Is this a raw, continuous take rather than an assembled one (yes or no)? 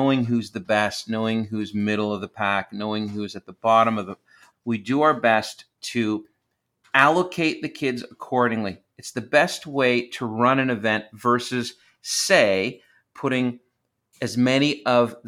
no